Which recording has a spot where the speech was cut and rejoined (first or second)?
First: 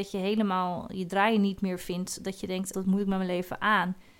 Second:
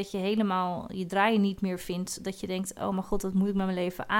first